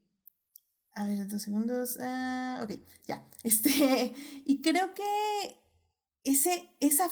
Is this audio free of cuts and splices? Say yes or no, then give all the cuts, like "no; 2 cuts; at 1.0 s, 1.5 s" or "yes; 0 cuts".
yes; 0 cuts